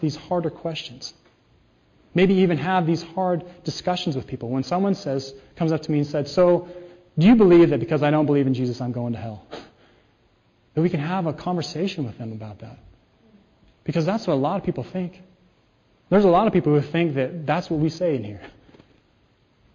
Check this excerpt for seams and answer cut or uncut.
uncut